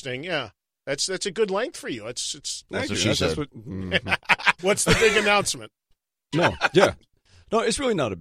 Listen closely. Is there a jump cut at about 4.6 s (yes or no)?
yes